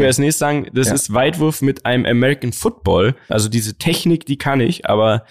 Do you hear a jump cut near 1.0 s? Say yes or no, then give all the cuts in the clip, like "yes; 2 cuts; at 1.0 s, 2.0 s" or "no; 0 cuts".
no; 1 cut; at 3.3 s